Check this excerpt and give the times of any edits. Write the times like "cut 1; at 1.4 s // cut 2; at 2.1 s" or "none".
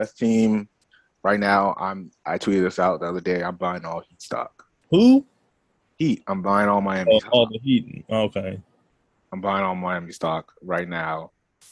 cut 1; at 4.8 s